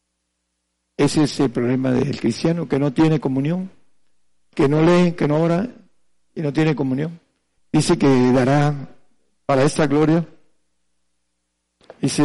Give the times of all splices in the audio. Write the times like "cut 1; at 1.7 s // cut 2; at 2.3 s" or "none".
cut 1; at 7.6 s